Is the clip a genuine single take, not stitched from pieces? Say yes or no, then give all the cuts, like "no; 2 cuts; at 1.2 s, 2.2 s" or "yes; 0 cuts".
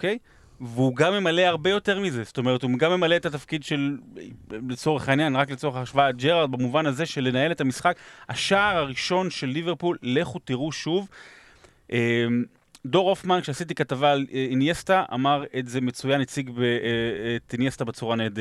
yes; 0 cuts